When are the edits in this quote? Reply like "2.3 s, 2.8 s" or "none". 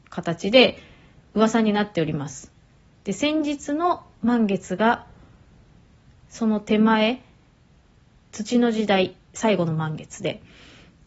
none